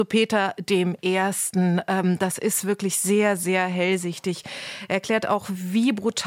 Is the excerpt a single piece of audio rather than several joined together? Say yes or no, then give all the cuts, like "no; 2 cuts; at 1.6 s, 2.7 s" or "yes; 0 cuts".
yes; 0 cuts